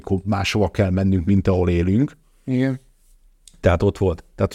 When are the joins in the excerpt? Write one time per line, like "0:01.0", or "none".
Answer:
none

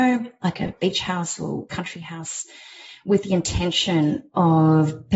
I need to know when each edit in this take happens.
none

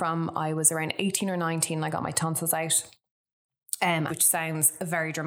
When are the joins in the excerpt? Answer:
0:04.1

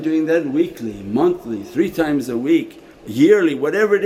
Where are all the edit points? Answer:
0:02.9

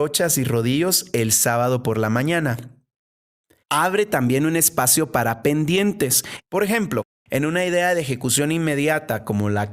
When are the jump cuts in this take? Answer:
0:03.6
0:06.4

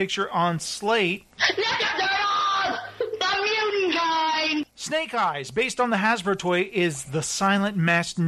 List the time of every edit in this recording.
none

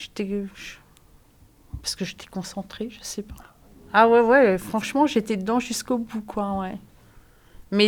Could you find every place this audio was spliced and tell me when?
none

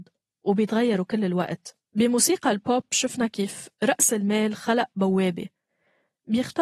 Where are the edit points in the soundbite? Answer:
0:01.8

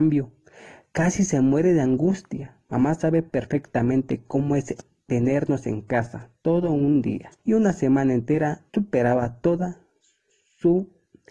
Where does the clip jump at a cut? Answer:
0:02.7
0:07.4
0:08.7

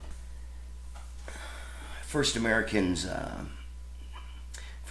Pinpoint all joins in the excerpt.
none

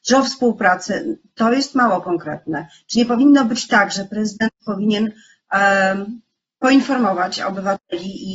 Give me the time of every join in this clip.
none

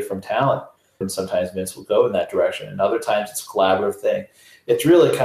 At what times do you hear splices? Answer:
0:01.0

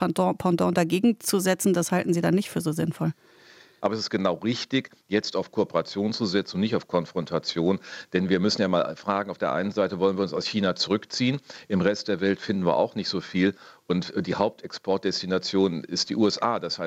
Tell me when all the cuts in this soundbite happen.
0:03.8

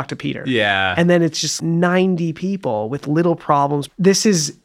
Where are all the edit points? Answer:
none

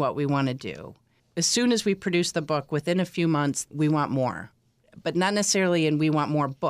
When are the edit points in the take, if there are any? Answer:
0:03.7

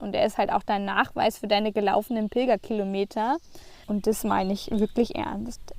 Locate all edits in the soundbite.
0:03.8

